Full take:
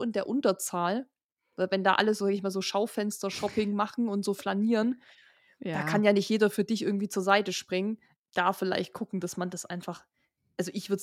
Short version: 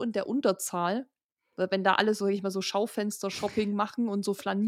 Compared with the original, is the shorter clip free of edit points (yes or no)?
yes